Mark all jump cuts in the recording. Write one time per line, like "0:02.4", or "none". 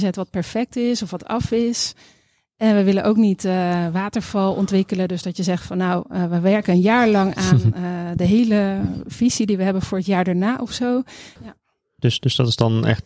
0:11.4